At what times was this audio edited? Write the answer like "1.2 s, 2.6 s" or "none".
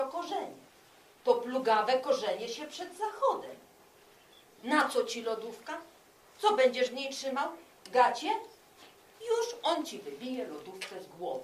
9.1 s